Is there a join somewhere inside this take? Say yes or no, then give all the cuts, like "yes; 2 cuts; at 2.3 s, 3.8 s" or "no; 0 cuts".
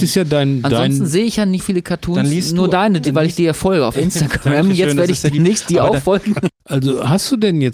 yes; 1 cut; at 1.6 s